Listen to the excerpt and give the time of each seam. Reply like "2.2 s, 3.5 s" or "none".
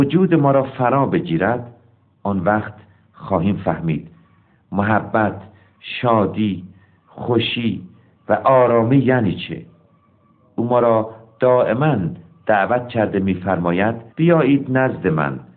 14.1 s